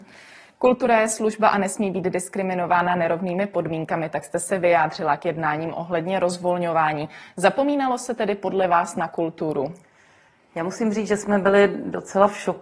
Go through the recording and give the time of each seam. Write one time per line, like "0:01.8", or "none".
none